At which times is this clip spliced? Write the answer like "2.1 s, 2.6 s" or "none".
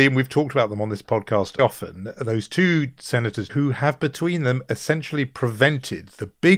1.6 s, 3.5 s